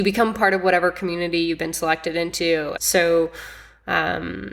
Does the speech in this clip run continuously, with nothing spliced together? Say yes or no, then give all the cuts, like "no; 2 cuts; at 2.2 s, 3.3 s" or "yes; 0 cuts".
no; 1 cut; at 2.8 s